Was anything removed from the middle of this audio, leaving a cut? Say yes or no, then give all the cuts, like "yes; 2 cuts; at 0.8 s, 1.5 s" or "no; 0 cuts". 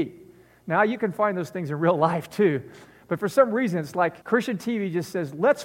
yes; 1 cut; at 4.2 s